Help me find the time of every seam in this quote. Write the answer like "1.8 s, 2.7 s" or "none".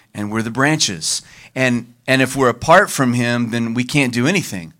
none

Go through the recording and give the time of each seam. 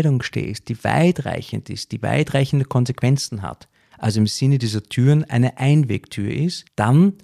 none

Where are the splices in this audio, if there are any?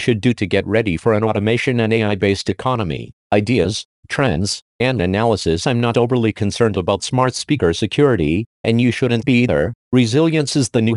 9.8 s

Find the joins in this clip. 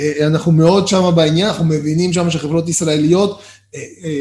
none

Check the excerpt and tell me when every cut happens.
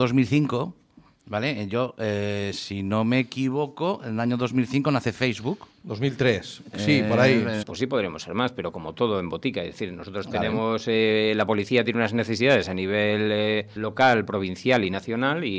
7.6 s, 13.8 s

